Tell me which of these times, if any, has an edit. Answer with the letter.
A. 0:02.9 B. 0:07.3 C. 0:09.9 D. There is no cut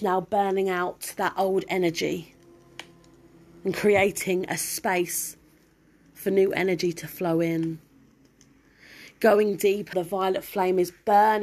C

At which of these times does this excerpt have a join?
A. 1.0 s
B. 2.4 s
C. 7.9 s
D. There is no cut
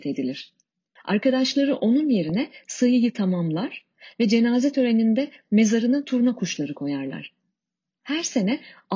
A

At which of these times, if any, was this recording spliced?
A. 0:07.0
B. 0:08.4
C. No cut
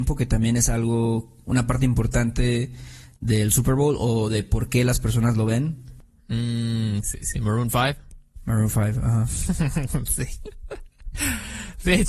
A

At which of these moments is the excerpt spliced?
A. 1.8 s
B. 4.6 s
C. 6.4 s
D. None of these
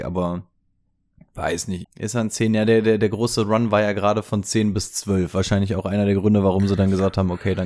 A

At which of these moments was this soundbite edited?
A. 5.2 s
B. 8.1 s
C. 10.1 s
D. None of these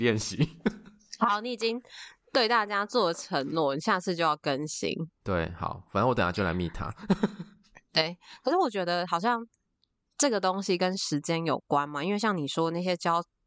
D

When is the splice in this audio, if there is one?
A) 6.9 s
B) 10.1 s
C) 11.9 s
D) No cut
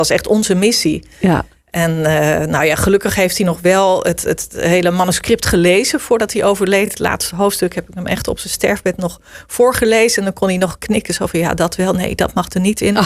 D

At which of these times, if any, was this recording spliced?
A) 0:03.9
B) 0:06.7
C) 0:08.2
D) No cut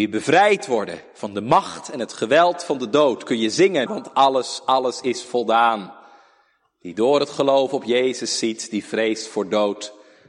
A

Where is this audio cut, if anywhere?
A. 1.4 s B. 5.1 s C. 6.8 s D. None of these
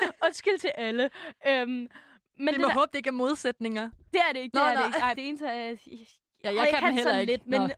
B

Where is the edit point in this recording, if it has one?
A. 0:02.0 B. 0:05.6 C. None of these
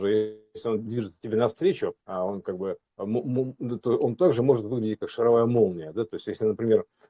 A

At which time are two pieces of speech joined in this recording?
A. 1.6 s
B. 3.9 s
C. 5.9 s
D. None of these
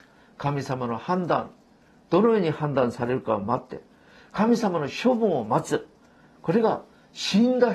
D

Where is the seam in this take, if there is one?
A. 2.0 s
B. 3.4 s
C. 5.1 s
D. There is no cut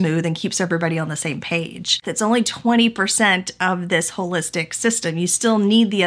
A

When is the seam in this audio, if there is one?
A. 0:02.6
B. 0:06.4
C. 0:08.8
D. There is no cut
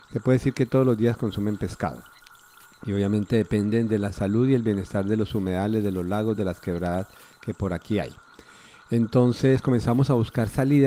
B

